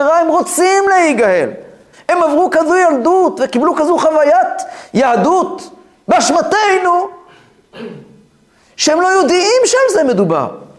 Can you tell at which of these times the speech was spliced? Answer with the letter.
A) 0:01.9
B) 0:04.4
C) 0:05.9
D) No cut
A